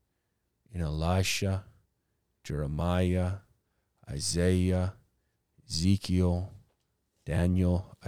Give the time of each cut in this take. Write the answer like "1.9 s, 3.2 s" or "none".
none